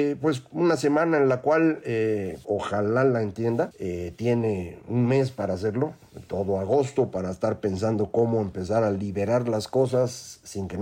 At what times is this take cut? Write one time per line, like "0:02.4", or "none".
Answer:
0:02.4